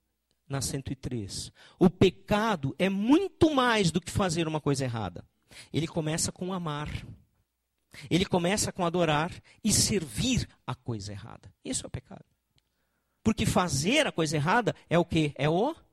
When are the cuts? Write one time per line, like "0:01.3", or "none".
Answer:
0:13.2